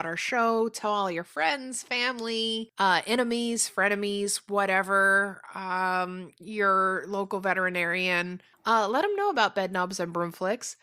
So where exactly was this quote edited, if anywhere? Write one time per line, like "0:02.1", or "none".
none